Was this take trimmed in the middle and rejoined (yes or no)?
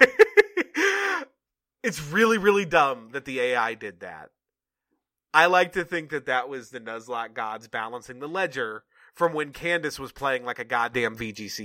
no